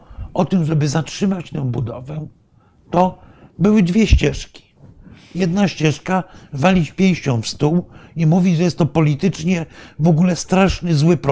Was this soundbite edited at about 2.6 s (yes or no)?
no